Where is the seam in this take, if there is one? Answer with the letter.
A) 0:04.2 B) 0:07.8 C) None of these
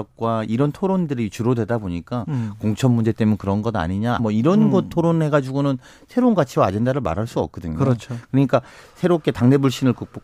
A